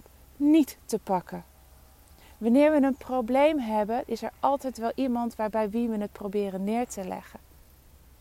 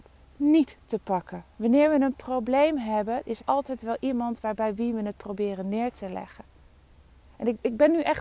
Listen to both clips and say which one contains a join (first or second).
second